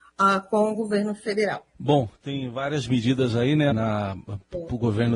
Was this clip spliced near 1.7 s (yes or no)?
yes